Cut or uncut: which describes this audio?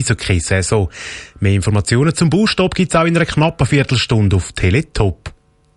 uncut